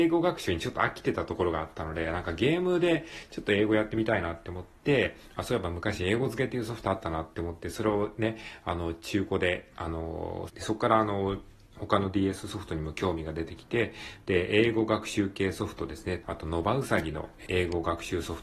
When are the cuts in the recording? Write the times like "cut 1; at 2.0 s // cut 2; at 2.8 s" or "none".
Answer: cut 1; at 10.5 s // cut 2; at 16.2 s // cut 3; at 17.5 s